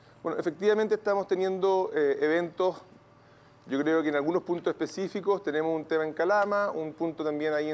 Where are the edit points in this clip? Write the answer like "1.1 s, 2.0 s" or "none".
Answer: none